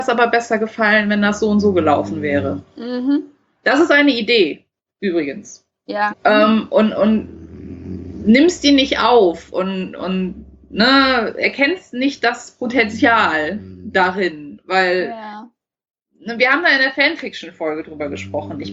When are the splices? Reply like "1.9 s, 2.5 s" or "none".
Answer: 6.1 s